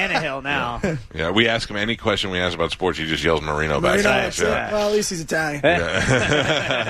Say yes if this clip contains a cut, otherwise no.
no